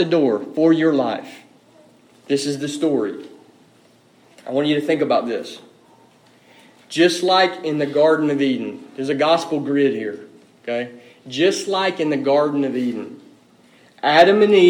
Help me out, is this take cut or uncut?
uncut